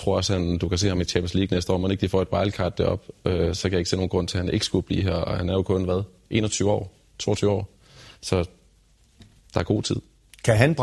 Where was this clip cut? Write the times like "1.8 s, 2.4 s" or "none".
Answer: none

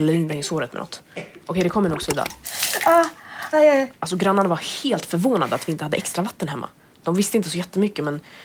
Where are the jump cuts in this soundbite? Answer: 3.5 s

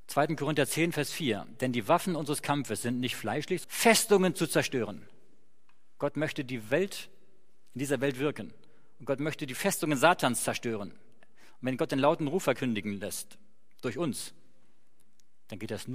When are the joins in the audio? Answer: 3.6 s

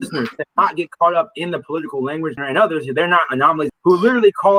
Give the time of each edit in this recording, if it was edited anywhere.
2.4 s, 3.7 s

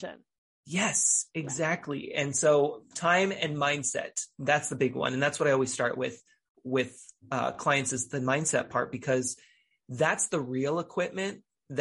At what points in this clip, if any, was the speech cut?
none

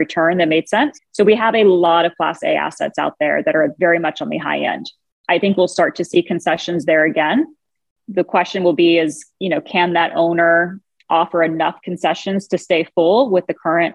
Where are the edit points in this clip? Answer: 0.9 s

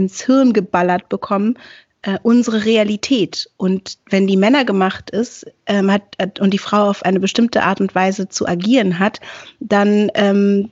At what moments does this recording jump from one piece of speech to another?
none

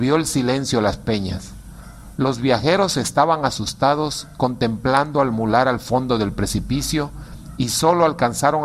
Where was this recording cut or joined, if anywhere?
none

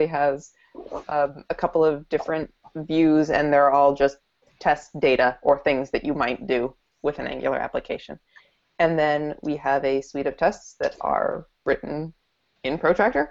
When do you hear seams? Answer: none

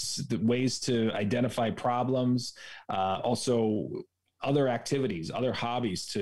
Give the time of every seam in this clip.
none

